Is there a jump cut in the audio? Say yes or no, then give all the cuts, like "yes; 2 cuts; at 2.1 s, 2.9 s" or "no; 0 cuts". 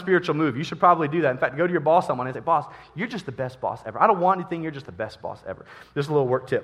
no; 0 cuts